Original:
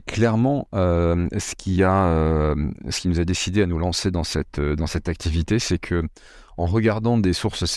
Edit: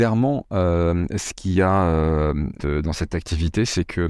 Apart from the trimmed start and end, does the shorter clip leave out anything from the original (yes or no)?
yes